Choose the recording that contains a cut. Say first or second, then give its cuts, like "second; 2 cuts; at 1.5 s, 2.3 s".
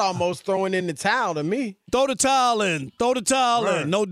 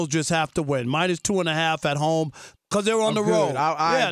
second; 1 cut; at 2.5 s